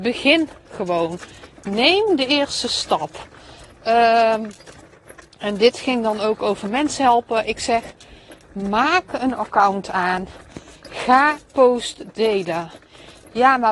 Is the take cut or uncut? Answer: uncut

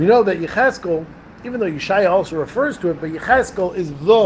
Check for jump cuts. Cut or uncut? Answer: uncut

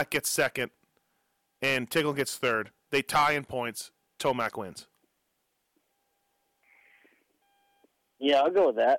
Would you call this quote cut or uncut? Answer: uncut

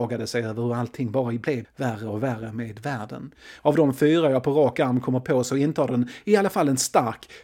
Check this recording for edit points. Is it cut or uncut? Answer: cut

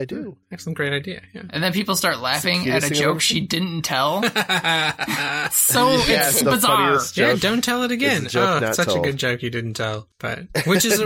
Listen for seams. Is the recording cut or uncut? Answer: cut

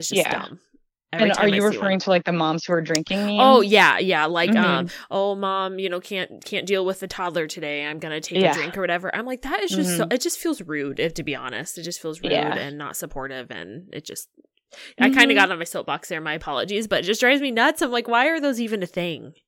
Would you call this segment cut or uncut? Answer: uncut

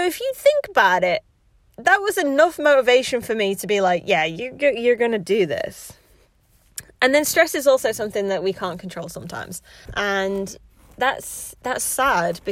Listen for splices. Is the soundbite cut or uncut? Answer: cut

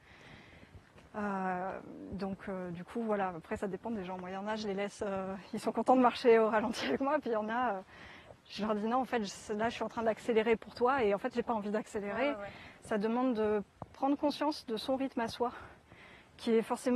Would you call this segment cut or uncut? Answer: uncut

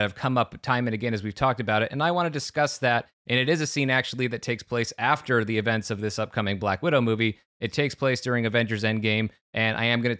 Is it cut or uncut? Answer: uncut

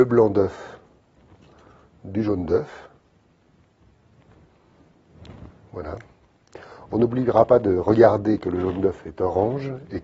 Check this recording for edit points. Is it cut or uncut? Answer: uncut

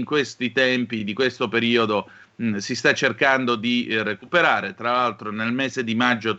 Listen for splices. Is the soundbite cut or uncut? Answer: uncut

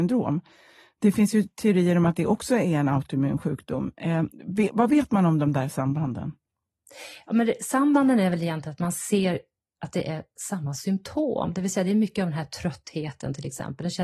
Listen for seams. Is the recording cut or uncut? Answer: uncut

